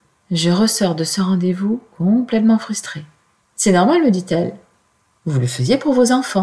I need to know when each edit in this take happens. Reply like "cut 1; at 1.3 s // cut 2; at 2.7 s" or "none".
cut 1; at 3.4 s